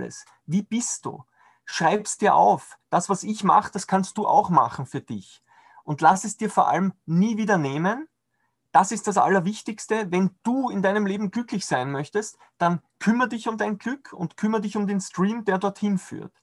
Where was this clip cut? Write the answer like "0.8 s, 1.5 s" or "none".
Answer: none